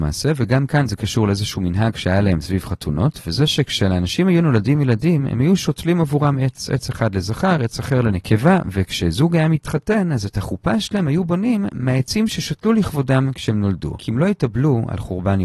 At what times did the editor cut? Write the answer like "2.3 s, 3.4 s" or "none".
14.0 s

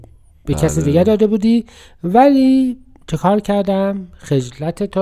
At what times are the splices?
none

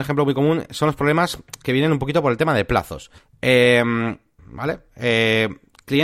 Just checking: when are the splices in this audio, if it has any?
4.4 s

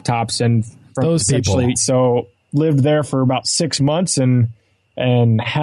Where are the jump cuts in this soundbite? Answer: 1.7 s

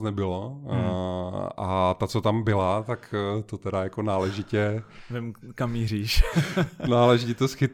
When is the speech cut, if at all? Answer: none

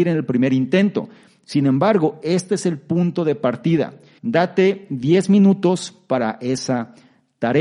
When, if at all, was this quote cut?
4.2 s

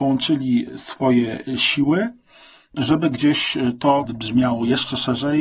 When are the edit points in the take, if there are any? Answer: 4.0 s

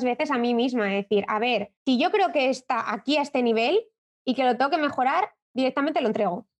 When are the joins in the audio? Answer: 1.8 s

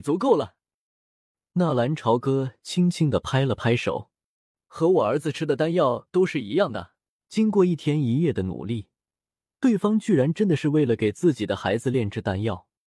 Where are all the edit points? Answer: 7.2 s

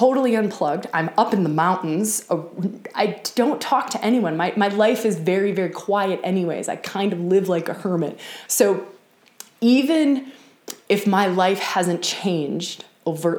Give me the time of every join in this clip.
8.5 s

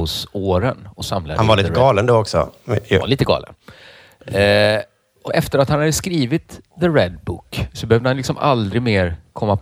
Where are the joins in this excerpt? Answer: 5.3 s

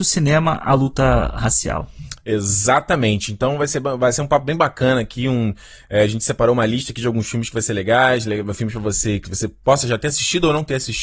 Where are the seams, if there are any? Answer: none

